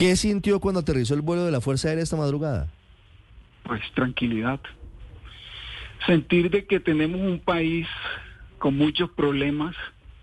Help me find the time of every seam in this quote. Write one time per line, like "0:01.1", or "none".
none